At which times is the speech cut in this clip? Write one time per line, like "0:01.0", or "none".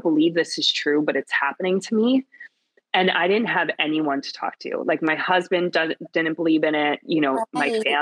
none